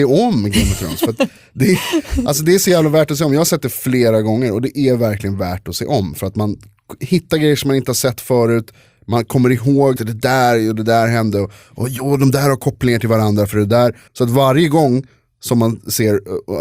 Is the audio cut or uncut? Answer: cut